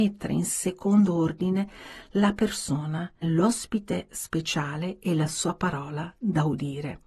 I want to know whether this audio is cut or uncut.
cut